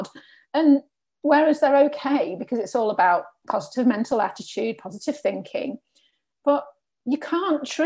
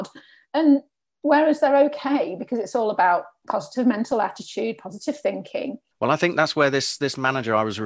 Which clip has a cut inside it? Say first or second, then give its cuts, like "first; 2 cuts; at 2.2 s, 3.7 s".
second; 1 cut; at 5.9 s